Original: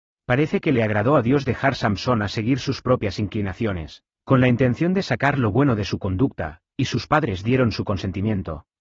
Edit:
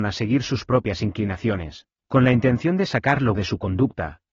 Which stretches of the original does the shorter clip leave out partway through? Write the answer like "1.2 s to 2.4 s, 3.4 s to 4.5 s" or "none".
5.5 s to 5.8 s